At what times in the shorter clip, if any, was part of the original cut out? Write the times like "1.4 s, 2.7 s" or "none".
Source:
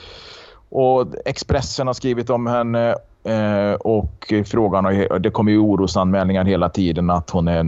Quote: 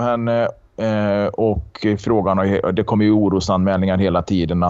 none